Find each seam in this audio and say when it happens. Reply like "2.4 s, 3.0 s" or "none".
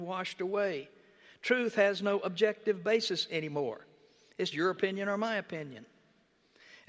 4.5 s